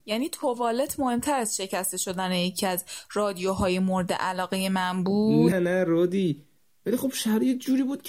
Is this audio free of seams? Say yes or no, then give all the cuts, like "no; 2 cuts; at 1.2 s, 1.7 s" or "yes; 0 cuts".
no; 1 cut; at 5.5 s